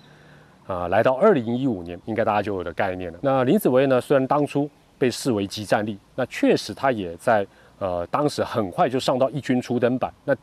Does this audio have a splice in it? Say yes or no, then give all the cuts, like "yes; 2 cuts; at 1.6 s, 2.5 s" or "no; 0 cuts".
yes; 2 cuts; at 2.0 s, 3.2 s